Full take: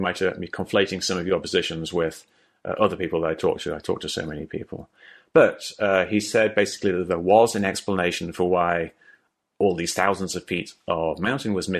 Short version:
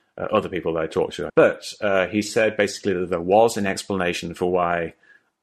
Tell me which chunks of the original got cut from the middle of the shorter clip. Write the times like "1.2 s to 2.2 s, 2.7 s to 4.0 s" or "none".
3.8 s to 5.3 s